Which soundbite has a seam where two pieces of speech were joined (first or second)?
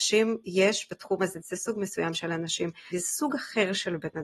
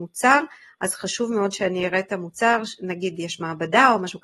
first